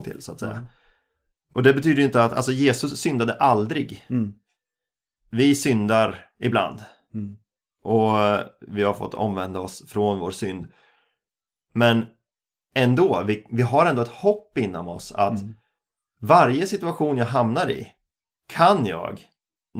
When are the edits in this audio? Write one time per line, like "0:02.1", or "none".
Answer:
none